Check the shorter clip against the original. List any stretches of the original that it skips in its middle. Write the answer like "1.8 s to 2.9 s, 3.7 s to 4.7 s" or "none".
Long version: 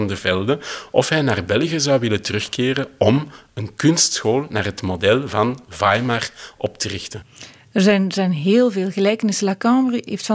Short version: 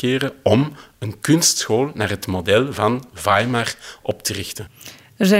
none